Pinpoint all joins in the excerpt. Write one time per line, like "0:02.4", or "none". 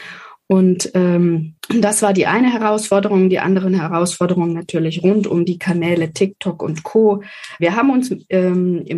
0:01.6
0:07.6